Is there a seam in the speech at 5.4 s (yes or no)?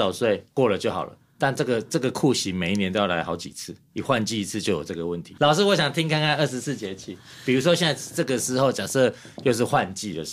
yes